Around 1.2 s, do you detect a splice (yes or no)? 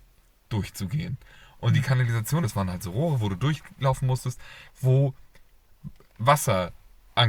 no